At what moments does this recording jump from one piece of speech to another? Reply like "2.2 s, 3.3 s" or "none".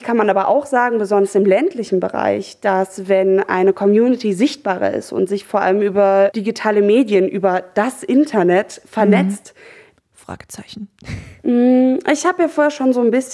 10.0 s